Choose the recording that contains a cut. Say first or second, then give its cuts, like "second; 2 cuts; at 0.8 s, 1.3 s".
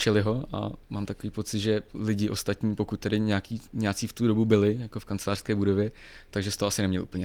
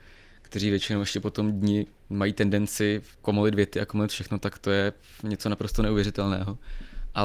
second; 2 cuts; at 2.0 s, 3.1 s